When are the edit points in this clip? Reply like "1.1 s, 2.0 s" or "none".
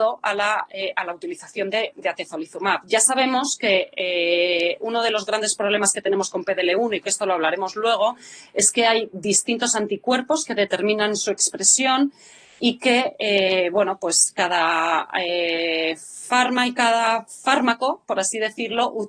none

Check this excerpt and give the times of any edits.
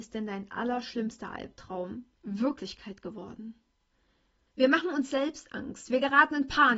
2.2 s, 4.5 s

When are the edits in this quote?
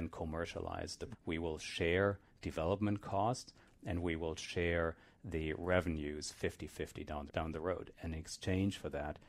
1.1 s, 7.3 s

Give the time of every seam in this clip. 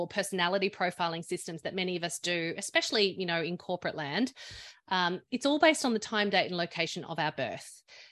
5.3 s

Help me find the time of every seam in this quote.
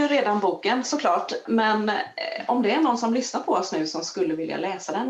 1.4 s

